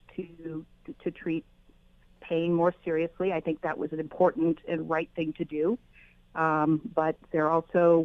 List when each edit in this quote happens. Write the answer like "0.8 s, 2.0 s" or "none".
none

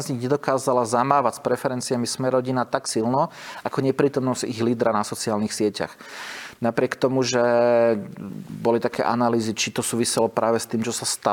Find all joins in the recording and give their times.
6.5 s

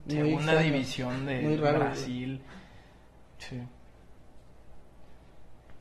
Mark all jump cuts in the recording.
3.3 s

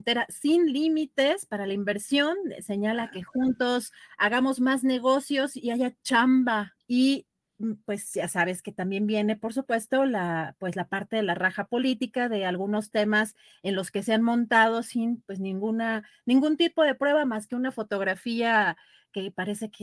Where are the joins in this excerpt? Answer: 6.8 s

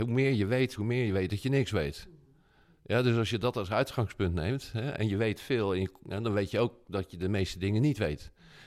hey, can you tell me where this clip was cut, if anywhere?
none

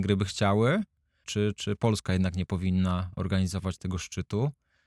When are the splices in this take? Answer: 1.2 s

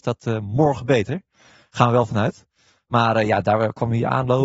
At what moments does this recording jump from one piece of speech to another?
none

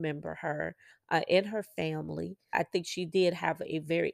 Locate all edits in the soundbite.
2.5 s

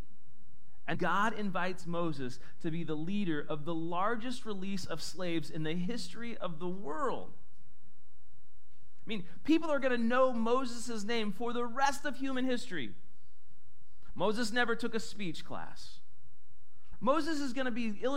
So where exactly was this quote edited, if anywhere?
0.9 s, 14.1 s, 16.9 s

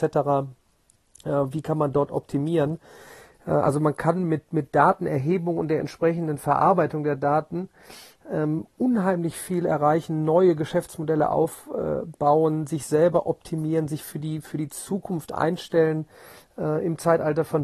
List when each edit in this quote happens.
none

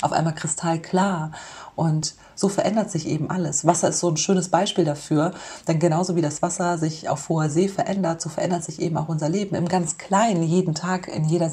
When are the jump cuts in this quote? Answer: none

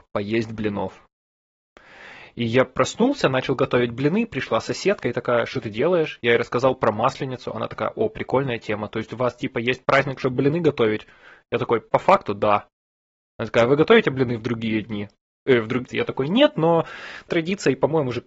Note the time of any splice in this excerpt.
15.9 s, 17.3 s

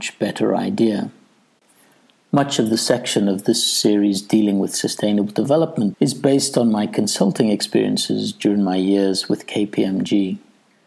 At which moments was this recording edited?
5.9 s

